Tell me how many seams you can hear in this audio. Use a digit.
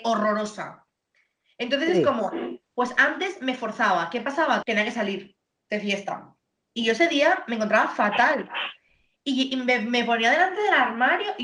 1